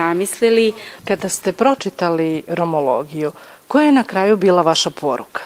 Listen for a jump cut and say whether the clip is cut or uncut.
cut